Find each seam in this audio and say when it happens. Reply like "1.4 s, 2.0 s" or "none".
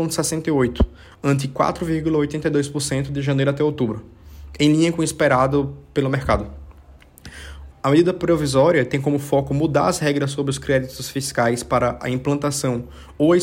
7.7 s